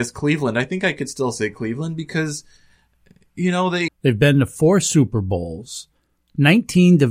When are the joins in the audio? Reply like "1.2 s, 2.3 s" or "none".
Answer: 3.9 s

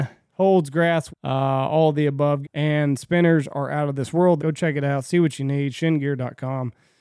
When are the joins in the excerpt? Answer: 1.1 s, 2.4 s, 4.4 s

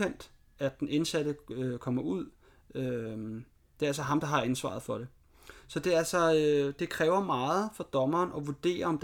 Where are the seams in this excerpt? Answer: none

